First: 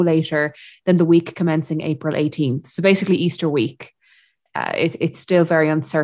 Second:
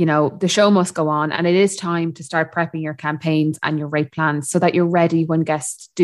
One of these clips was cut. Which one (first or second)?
first